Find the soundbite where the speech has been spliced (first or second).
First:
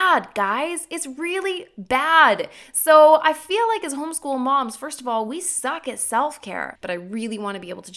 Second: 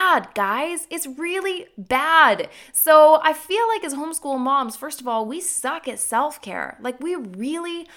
first